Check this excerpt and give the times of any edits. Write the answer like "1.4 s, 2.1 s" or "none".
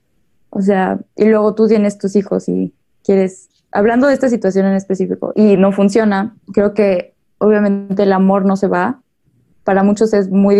5.3 s, 6.4 s

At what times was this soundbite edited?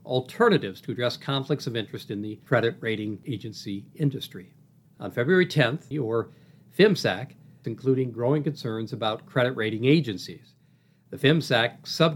4.9 s, 5.9 s, 7.6 s

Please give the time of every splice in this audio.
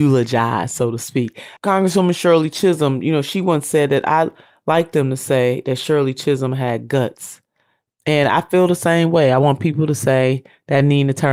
1.6 s, 7.9 s

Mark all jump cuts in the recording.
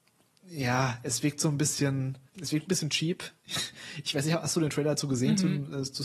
2.3 s

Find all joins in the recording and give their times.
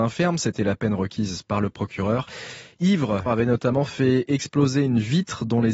3.3 s

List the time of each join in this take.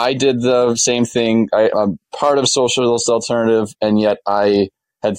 1.7 s

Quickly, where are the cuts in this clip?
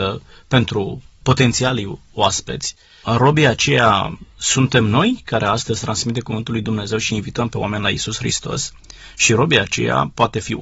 none

